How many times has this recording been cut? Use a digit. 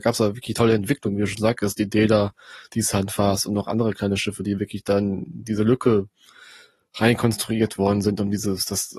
0